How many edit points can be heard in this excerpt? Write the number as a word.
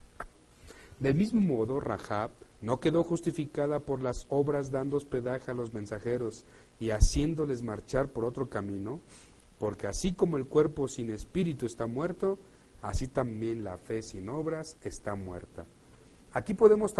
one